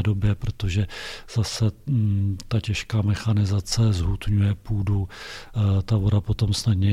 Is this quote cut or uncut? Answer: uncut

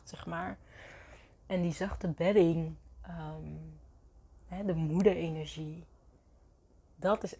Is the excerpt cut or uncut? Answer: uncut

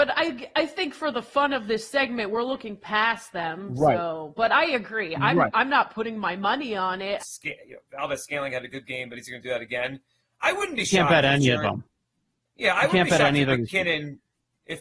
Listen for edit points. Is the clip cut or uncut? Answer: cut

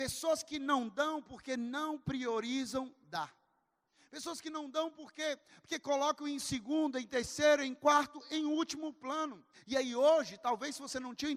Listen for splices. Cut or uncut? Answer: cut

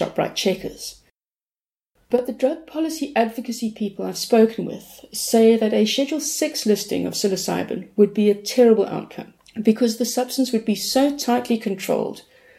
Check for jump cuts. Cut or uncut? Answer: uncut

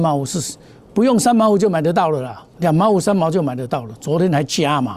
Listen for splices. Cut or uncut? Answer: cut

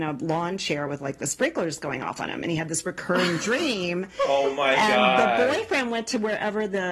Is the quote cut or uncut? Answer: uncut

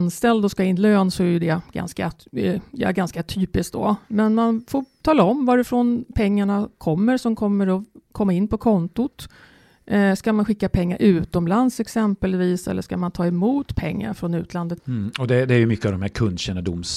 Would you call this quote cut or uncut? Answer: cut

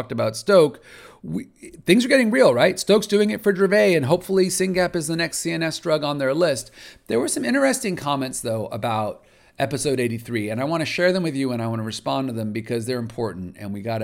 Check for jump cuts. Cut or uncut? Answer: uncut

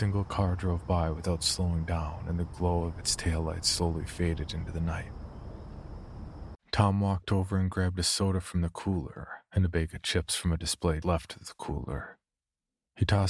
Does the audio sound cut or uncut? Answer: cut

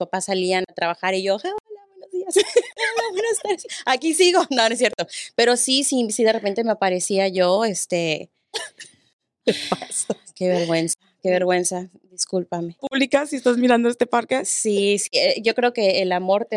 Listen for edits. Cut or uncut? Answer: cut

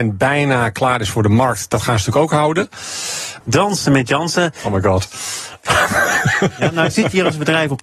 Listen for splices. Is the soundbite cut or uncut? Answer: cut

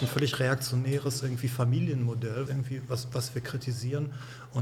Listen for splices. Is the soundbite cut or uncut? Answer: cut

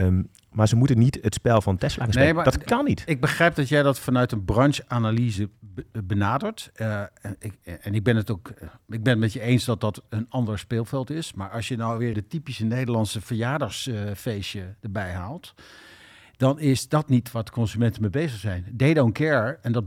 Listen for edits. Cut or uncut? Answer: cut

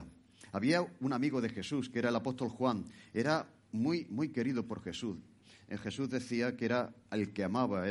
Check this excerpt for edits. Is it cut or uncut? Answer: cut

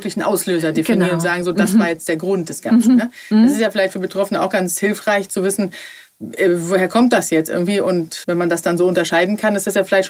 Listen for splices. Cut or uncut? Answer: cut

